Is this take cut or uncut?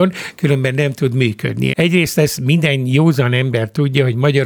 cut